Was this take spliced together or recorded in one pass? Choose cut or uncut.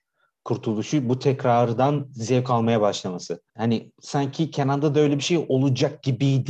cut